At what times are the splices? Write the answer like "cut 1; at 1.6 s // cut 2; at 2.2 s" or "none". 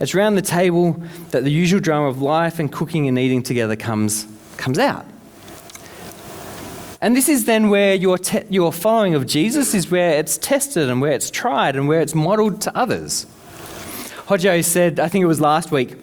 cut 1; at 7.0 s